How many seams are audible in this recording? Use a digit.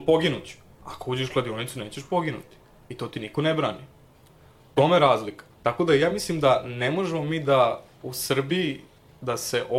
0